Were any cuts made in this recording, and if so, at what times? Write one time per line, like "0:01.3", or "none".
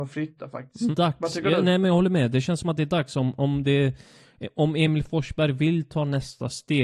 0:00.9